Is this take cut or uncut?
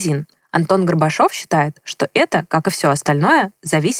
uncut